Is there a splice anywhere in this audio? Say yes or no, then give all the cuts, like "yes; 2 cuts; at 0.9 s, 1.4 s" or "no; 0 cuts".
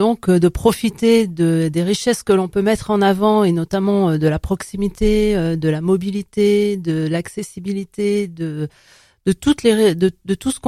no; 0 cuts